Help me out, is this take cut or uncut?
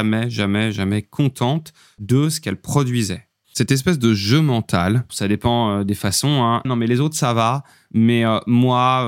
cut